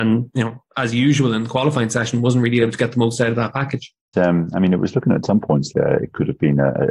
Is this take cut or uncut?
cut